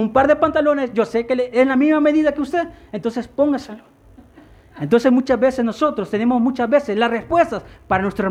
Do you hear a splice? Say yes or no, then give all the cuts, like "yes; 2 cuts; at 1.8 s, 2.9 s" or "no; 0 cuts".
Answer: no; 0 cuts